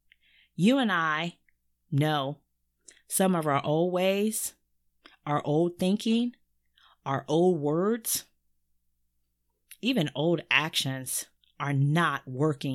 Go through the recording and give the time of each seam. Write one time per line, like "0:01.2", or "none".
none

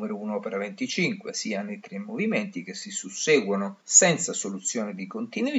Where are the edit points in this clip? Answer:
0:03.8

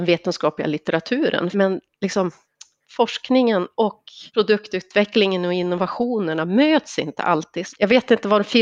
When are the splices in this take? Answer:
0:01.5
0:04.3
0:07.7

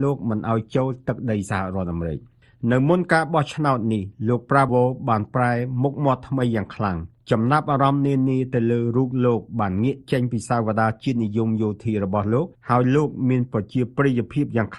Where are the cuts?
0:04.7

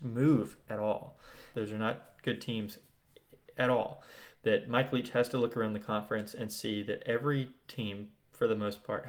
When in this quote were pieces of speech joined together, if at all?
0:01.5
0:04.3

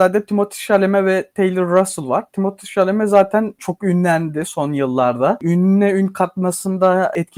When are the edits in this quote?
none

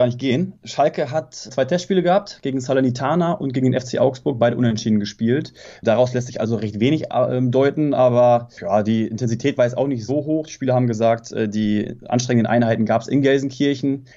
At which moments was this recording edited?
0:10.1

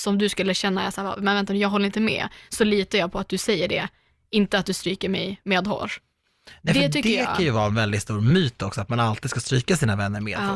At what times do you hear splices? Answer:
none

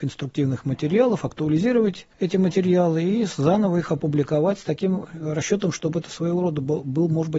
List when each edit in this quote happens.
0:02.1

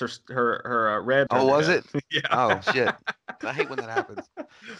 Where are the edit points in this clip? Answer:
0:01.3
0:03.4

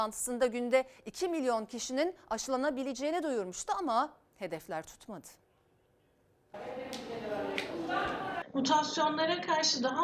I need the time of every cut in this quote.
none

